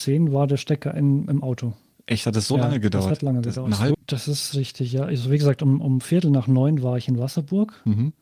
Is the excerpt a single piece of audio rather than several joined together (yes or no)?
no